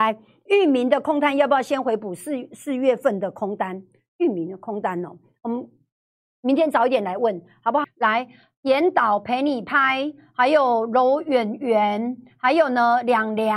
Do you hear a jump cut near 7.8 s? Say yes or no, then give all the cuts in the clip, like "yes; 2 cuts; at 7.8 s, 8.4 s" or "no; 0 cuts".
yes; 1 cut; at 7.8 s